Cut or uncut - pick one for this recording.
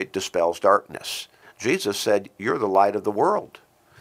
cut